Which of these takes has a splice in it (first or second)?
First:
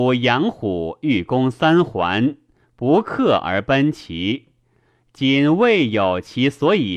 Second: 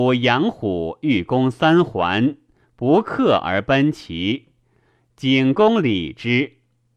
first